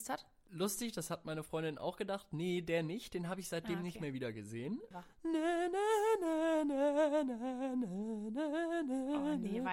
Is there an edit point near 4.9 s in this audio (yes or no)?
yes